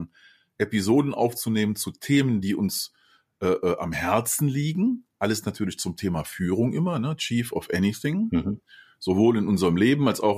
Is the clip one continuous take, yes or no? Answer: yes